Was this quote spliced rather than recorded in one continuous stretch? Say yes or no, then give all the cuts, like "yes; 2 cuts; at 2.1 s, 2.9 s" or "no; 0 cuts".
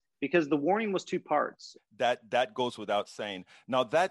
yes; 1 cut; at 1.8 s